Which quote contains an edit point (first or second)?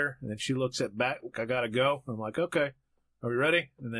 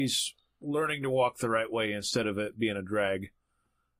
first